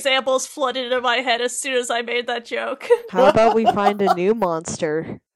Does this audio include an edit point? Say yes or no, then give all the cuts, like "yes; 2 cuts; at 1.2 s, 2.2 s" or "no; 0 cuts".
yes; 1 cut; at 3.1 s